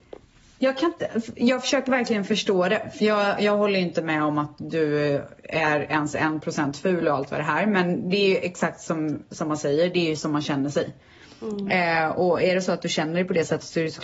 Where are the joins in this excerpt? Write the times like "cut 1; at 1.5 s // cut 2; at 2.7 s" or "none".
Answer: none